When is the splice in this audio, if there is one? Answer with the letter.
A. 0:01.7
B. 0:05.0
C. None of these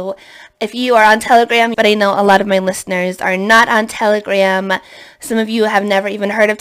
A